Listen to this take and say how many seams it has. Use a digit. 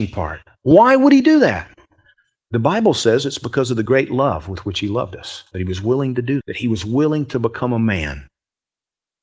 1